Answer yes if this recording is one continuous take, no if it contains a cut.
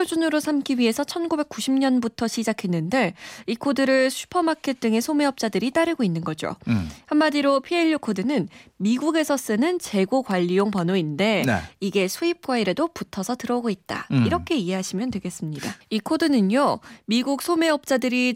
no